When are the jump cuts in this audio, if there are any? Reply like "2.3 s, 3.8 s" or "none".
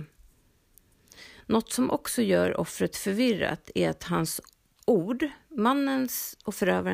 none